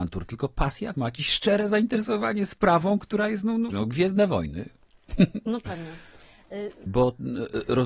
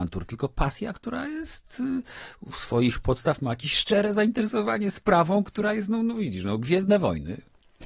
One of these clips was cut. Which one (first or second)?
first